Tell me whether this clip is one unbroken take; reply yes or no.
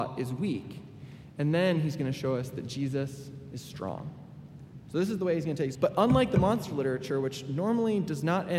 no